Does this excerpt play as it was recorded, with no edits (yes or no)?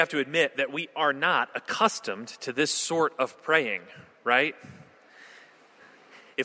yes